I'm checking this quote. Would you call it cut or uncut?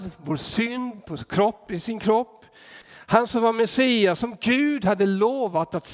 cut